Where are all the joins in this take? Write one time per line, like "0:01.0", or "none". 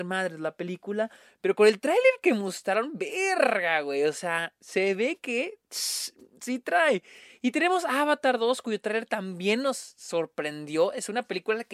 none

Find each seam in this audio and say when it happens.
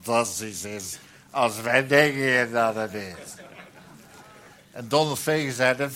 none

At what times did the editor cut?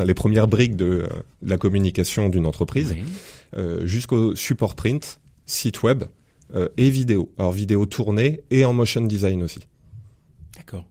none

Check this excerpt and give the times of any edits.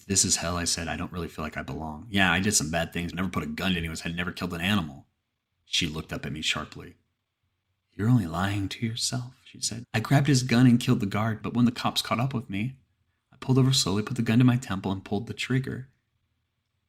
0:03.1
0:09.8
0:11.4

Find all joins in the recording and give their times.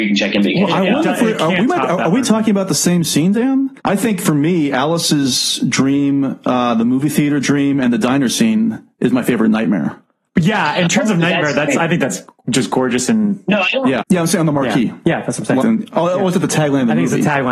0:03.8
0:14.0
0:15.6

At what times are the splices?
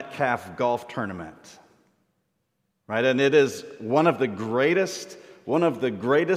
none

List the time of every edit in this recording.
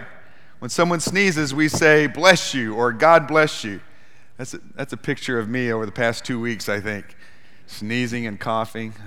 none

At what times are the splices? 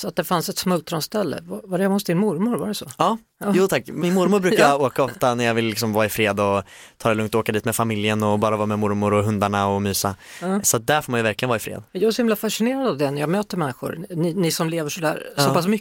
0:04.0
0:11.9

